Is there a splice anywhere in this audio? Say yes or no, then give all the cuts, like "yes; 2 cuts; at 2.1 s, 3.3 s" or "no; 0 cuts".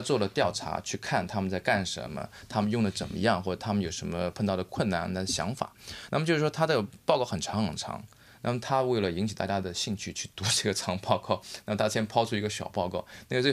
yes; 1 cut; at 6.1 s